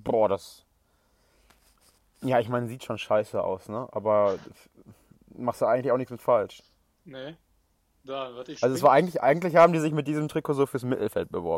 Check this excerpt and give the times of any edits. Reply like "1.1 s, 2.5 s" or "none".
none